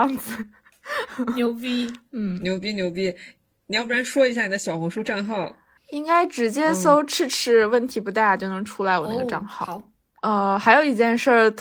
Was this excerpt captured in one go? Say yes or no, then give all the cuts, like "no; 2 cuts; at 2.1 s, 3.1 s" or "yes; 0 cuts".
yes; 0 cuts